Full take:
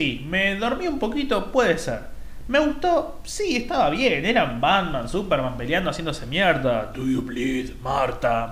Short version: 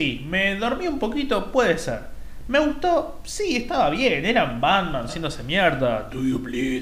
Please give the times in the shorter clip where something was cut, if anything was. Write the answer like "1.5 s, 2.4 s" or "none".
5.1 s